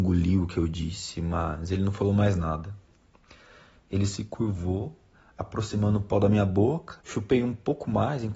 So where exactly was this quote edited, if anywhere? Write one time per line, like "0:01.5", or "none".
0:07.0